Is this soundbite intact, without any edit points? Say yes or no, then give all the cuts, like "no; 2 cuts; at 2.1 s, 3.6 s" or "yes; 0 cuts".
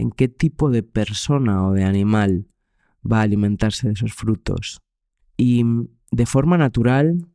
no; 1 cut; at 5.2 s